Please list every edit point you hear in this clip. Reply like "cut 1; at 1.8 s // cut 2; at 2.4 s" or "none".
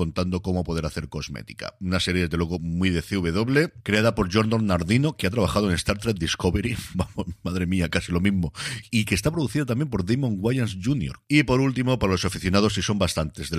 cut 1; at 11.2 s